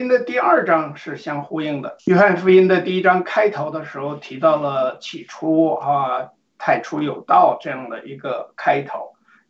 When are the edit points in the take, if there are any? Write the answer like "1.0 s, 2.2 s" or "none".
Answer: 2.0 s